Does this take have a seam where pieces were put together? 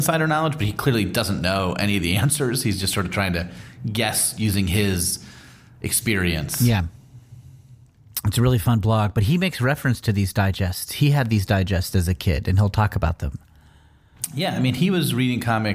no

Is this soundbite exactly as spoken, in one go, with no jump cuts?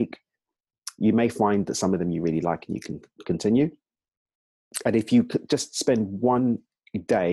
yes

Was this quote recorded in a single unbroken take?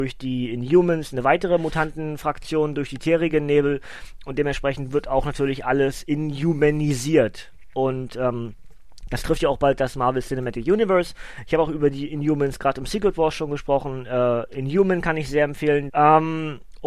no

